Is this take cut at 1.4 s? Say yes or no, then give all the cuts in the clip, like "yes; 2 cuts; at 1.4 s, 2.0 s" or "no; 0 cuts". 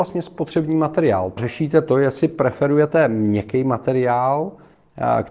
yes; 1 cut; at 1.4 s